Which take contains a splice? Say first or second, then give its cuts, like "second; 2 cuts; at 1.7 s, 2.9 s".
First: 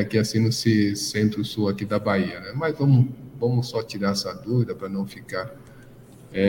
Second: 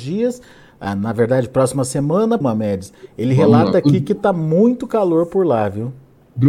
second; 1 cut; at 2.4 s